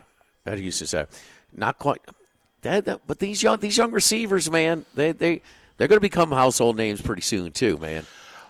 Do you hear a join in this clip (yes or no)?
no